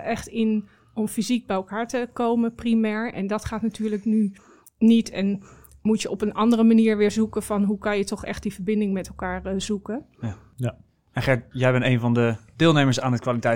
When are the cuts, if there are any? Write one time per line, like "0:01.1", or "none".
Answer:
none